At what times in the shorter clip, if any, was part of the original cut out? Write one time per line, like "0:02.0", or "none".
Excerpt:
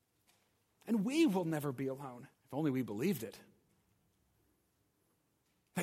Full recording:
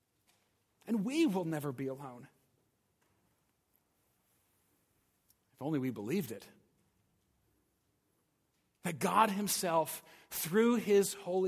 0:02.3